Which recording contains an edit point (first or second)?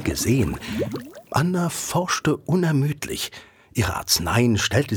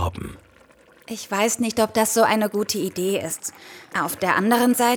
second